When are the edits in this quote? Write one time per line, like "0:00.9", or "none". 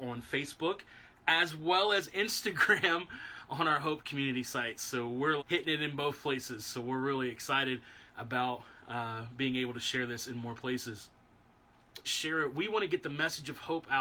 0:05.4
0:12.0